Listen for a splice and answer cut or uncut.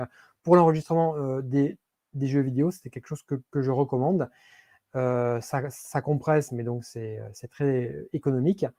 uncut